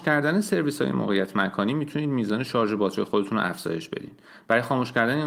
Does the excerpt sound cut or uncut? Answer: uncut